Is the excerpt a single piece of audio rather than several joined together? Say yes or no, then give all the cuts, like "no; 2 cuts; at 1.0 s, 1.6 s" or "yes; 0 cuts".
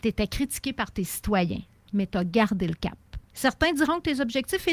no; 2 cuts; at 1.9 s, 3.3 s